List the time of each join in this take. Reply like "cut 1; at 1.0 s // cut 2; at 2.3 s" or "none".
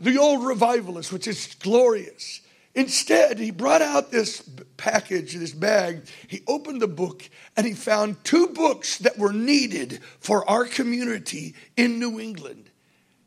none